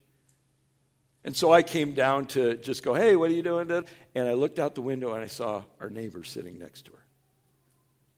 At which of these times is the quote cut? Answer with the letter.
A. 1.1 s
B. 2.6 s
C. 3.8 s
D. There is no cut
C